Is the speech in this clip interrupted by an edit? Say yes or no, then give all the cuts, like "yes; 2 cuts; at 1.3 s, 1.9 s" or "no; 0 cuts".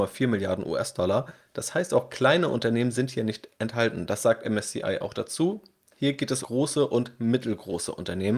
yes; 1 cut; at 6.4 s